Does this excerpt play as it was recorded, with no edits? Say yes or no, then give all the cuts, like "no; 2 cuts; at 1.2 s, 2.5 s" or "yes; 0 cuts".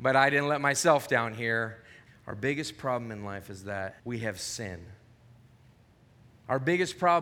no; 2 cuts; at 2.1 s, 4.0 s